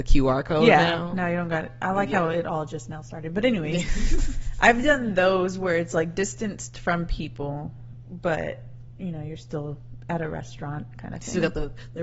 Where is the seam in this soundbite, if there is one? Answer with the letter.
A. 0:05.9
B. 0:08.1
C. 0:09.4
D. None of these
D